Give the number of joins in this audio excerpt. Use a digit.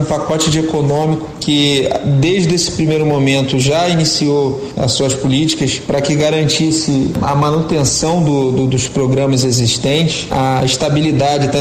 0